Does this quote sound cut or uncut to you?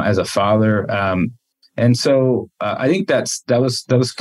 uncut